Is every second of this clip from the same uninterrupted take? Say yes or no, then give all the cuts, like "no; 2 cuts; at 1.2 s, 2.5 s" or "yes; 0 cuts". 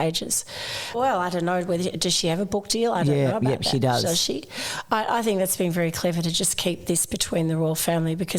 no; 1 cut; at 0.9 s